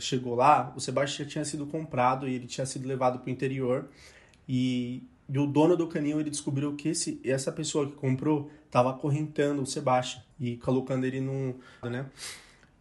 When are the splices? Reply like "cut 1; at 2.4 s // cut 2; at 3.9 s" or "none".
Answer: cut 1; at 10.3 s // cut 2; at 11.8 s